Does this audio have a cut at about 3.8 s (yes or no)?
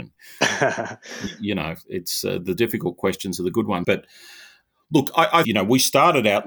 yes